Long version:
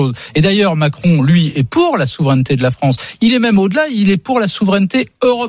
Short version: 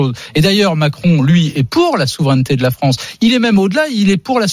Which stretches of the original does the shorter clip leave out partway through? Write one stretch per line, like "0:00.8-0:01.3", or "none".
none